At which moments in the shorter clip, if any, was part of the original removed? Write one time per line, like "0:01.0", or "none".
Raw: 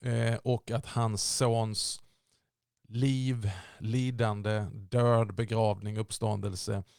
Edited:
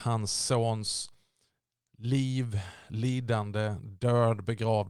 none

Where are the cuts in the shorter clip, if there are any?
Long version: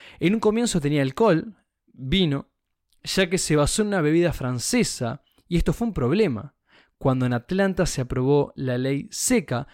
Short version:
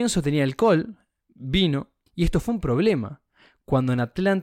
0:02.1

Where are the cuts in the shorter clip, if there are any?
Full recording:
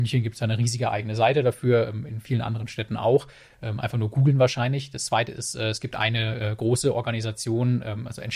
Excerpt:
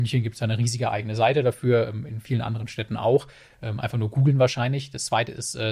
none

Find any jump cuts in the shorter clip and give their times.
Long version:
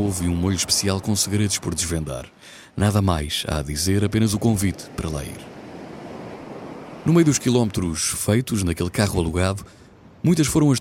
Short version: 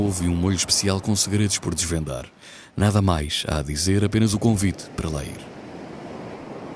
none

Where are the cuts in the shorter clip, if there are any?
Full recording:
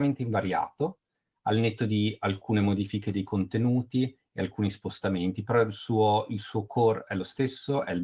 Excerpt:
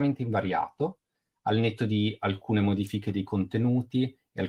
none

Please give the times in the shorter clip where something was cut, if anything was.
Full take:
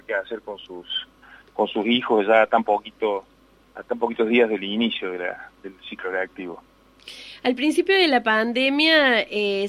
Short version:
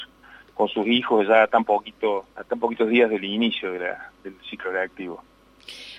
0:02.3

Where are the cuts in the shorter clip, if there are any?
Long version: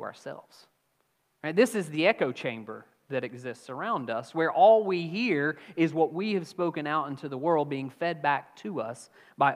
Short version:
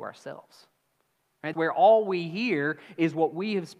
0:01.5

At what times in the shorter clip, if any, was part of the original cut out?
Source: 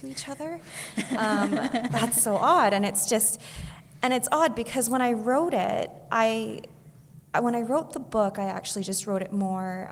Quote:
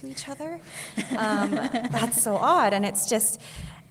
none

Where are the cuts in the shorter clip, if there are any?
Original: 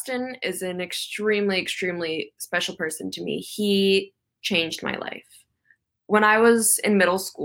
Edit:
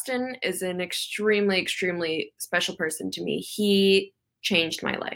none

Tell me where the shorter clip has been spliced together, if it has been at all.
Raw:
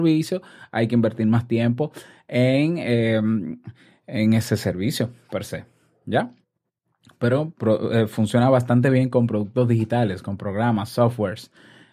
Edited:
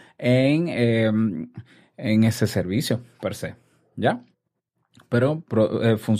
none

